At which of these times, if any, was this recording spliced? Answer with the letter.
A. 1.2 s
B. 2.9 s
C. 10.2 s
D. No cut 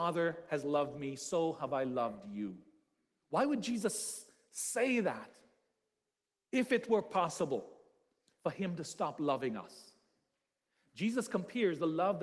D